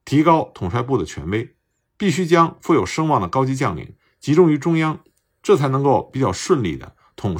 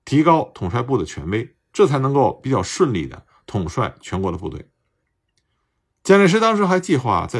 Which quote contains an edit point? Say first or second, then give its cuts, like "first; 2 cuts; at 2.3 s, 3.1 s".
second; 1 cut; at 1.7 s